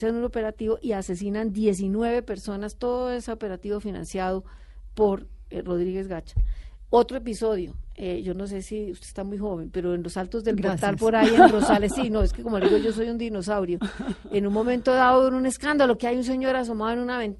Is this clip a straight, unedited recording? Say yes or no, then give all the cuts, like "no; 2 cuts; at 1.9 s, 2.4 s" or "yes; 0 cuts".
yes; 0 cuts